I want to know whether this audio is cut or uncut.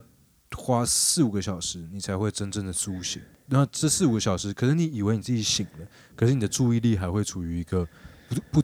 uncut